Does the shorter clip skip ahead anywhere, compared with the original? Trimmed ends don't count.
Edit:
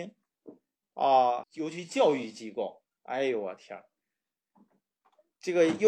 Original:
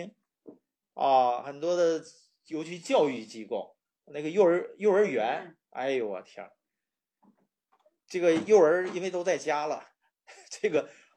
yes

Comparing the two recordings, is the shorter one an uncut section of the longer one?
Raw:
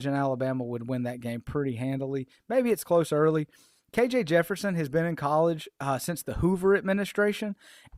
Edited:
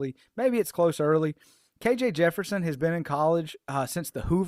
yes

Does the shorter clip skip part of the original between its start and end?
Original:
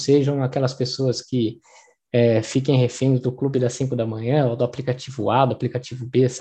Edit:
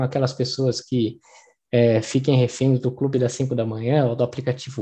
no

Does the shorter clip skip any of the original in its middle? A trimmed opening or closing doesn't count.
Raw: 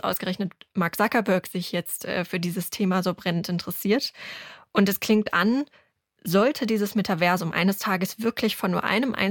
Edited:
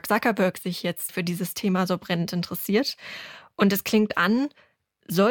yes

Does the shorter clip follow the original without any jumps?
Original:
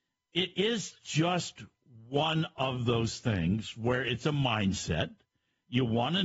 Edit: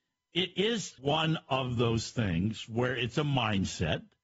no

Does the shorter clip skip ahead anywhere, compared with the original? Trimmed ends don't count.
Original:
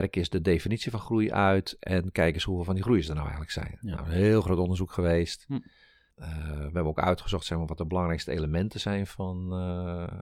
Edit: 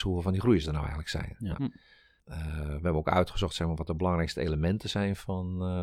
yes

